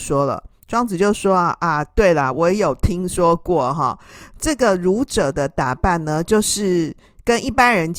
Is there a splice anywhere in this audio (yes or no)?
no